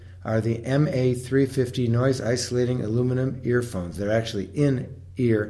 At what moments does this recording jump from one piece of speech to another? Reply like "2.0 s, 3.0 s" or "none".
none